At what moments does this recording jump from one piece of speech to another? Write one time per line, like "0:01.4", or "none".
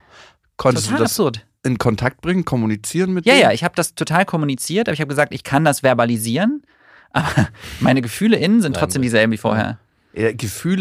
none